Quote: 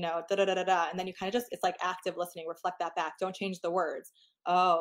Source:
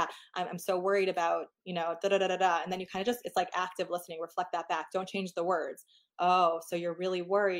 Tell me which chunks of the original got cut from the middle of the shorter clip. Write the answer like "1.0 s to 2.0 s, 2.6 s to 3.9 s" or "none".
none